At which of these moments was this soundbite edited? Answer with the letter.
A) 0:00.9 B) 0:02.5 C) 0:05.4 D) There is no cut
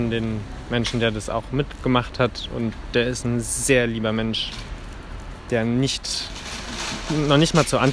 D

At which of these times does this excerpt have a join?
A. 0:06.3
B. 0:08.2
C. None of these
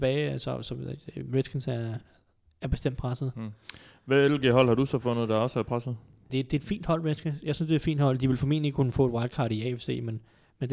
A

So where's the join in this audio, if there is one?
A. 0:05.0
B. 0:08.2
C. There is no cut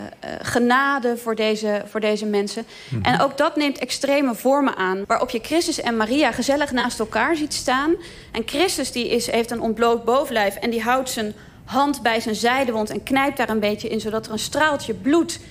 A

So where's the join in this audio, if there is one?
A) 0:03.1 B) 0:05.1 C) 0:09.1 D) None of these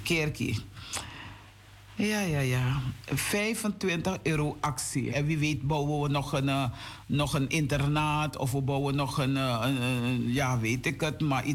B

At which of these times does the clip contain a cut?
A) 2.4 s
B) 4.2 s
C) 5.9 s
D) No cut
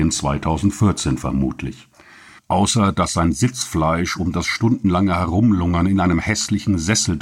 A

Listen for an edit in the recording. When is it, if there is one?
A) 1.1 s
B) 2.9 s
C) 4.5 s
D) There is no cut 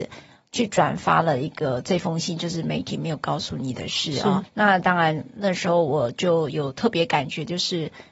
D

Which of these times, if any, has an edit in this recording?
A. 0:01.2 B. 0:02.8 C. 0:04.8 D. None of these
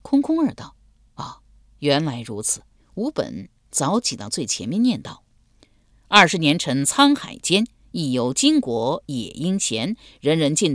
B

